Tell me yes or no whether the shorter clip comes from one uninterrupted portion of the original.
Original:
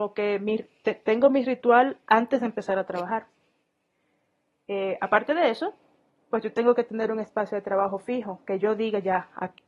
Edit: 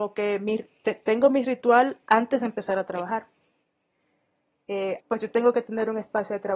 no